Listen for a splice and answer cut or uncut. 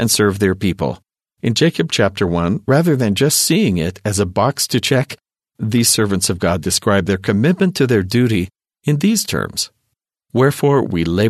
uncut